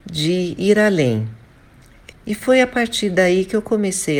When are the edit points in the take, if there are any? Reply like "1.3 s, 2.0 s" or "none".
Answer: 2.1 s